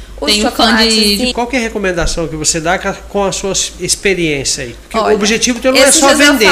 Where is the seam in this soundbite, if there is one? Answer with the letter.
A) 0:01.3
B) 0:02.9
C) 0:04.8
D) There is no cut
A